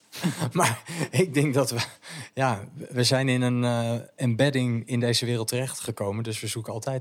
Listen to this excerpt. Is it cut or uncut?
uncut